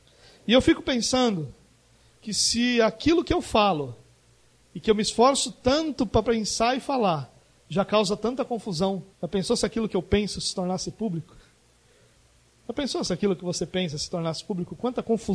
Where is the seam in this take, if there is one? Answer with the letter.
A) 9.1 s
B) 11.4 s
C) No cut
A